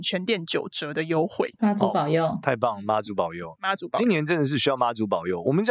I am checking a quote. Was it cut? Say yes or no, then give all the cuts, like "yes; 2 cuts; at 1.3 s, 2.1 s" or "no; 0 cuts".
yes; 1 cut; at 1.5 s